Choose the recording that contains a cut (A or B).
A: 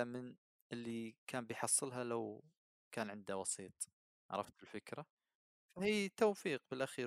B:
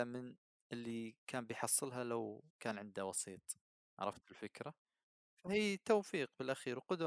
B